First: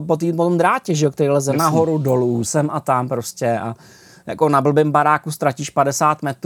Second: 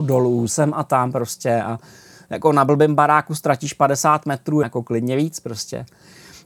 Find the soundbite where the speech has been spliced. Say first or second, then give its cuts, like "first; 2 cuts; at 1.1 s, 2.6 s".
second; 1 cut; at 4.6 s